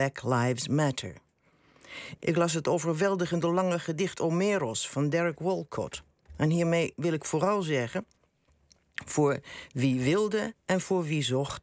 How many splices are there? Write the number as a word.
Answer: one